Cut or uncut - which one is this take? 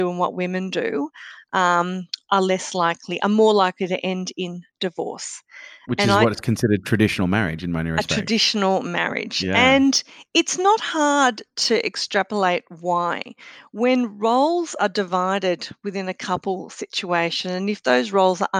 uncut